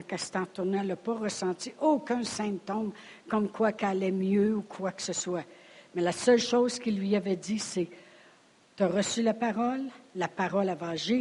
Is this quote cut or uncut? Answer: uncut